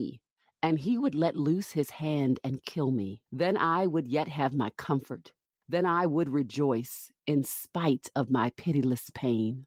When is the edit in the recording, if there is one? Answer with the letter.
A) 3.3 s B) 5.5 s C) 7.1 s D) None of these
A